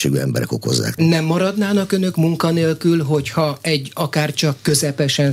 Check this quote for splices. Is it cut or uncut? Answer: uncut